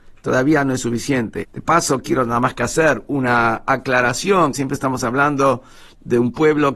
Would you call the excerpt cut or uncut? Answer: cut